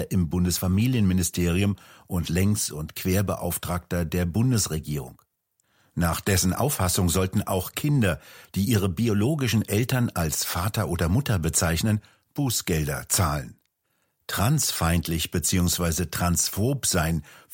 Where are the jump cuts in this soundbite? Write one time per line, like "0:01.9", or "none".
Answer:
none